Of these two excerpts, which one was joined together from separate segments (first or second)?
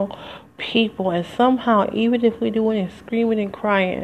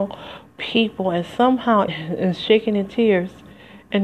second